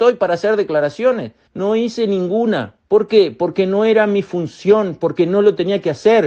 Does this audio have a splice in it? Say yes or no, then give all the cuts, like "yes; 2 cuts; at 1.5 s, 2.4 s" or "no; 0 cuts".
yes; 2 cuts; at 1.5 s, 2.8 s